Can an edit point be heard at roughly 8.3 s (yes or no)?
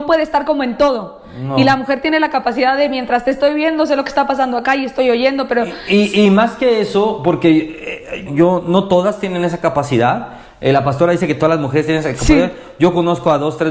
yes